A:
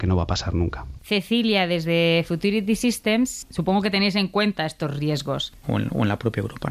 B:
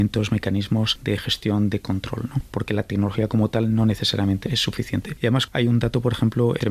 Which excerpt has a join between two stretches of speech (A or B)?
A